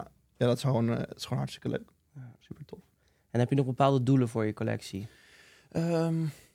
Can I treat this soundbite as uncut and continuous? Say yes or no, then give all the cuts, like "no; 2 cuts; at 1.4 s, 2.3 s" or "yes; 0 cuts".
yes; 0 cuts